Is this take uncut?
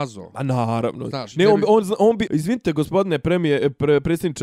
no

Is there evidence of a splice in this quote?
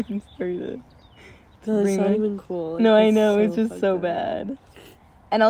no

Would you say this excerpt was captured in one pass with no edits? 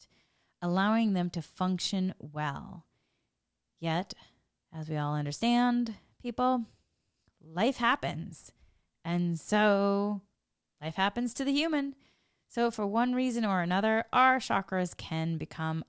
yes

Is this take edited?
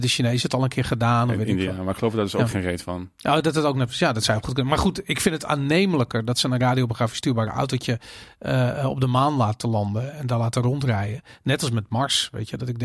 no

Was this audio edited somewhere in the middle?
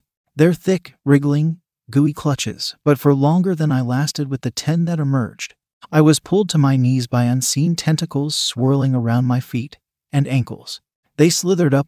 no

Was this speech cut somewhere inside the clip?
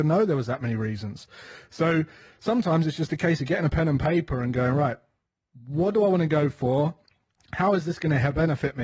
no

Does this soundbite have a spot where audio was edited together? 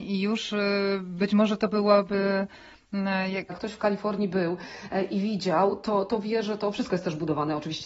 yes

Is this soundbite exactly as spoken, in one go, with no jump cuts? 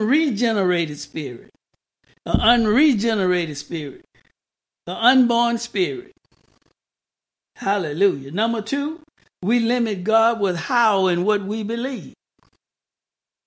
yes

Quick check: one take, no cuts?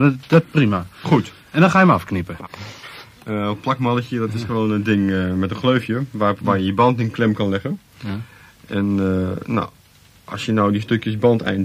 no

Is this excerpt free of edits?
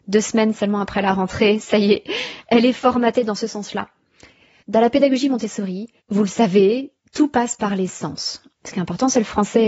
no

